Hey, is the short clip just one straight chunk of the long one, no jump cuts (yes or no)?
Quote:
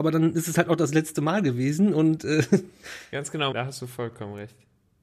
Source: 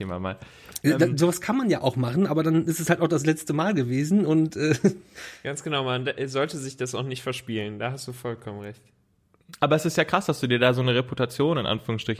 no